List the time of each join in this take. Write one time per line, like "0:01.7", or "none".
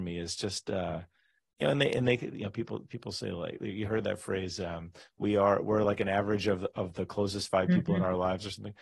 none